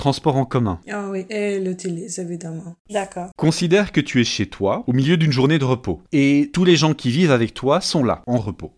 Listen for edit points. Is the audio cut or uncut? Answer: cut